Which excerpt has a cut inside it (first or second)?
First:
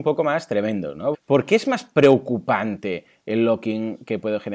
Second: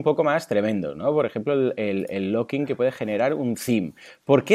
first